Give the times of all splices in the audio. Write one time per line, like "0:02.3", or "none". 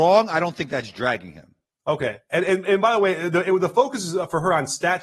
none